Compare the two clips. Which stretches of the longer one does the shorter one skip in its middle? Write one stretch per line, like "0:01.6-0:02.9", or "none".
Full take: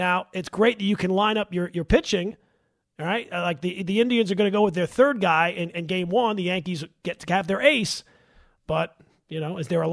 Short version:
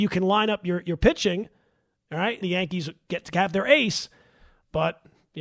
0:03.3-0:06.4